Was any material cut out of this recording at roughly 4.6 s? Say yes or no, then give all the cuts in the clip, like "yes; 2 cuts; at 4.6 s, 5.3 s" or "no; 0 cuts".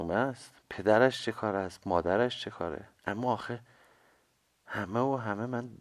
no; 1 cut; at 3.0 s